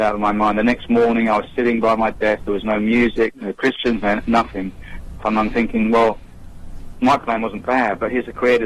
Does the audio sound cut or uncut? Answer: cut